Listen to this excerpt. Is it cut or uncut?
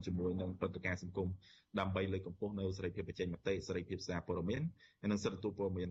uncut